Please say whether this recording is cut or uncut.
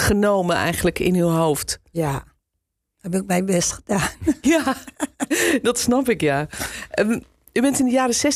uncut